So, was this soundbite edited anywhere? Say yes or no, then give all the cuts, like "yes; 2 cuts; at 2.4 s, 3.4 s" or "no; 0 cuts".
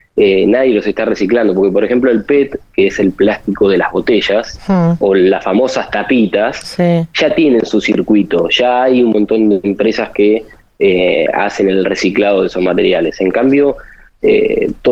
no; 0 cuts